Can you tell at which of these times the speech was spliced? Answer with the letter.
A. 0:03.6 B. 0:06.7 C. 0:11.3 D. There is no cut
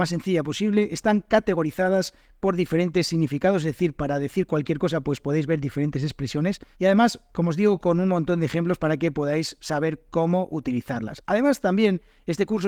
B